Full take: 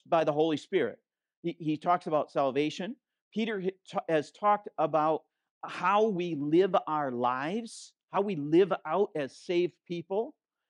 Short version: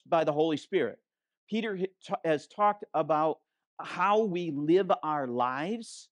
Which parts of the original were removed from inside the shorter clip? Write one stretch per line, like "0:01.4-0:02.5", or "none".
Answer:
0:01.3-0:03.1

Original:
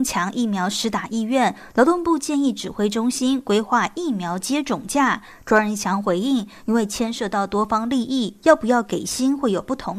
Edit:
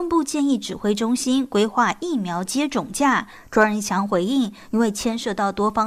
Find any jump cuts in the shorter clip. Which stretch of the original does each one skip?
none

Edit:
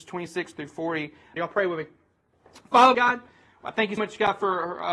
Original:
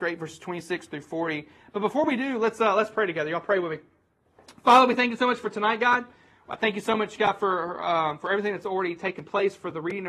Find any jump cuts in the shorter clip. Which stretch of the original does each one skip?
0:01.7-0:03.3
0:04.9-0:05.8
0:06.8-0:07.0

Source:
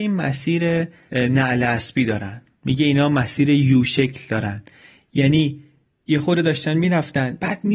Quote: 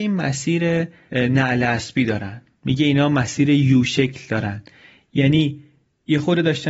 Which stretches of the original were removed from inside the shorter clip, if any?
none

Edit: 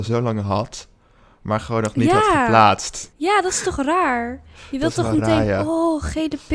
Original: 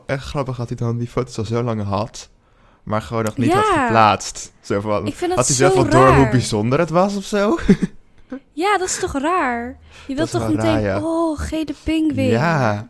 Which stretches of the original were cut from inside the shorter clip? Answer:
0:04.5-0:08.5

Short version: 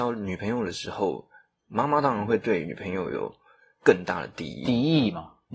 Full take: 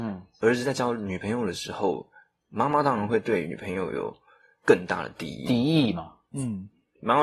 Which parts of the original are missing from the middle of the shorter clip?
none

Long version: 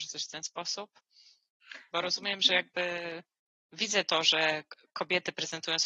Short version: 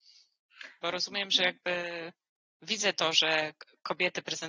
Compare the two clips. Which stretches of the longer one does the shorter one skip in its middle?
none

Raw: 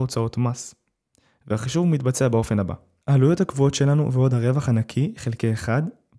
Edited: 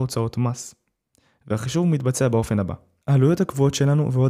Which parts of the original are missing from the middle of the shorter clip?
none

